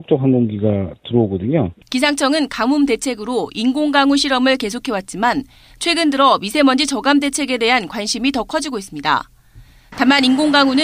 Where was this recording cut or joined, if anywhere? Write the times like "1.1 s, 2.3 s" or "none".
1.8 s